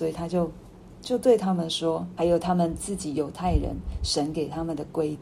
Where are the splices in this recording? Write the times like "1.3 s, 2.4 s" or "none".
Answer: 2.2 s